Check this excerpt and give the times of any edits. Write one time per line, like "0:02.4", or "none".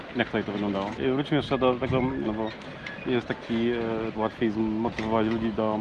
0:01.0
0:02.2
0:04.1